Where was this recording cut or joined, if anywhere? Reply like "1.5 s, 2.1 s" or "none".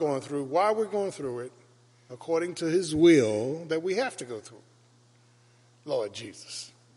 2.1 s